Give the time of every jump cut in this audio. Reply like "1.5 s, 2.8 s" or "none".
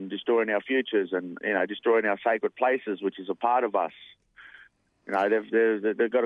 1.4 s